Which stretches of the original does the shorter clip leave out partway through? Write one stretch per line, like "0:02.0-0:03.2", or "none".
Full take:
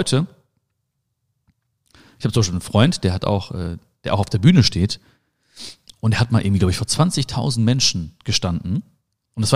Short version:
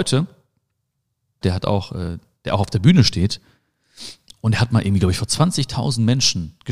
0:01.4-0:03.0